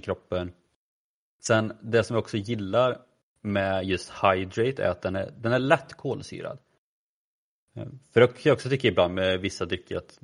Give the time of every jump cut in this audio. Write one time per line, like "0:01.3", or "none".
0:01.4

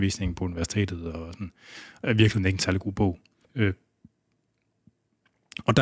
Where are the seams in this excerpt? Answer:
0:03.4

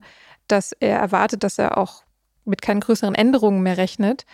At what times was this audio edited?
0:01.4

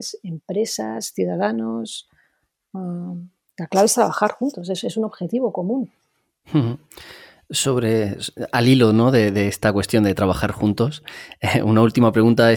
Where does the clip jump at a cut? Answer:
none

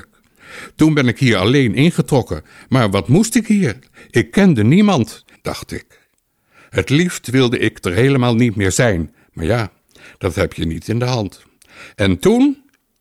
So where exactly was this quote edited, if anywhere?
0:05.4

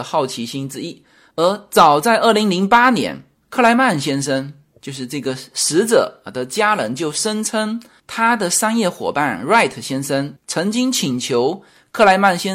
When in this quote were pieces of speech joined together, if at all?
0:01.3

